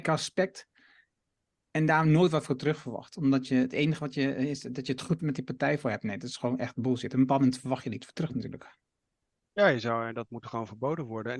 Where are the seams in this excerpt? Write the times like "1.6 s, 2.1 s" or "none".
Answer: 5.2 s